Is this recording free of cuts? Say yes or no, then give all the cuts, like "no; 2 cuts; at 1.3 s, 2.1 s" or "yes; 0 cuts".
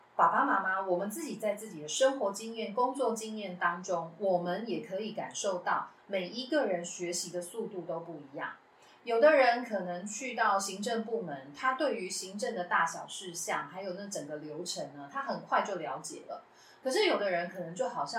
yes; 0 cuts